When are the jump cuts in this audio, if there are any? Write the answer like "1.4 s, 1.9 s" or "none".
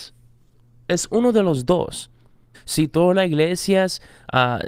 2.5 s